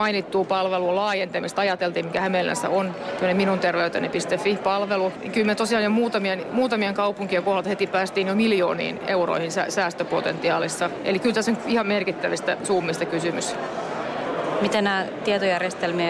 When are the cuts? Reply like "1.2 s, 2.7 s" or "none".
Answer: none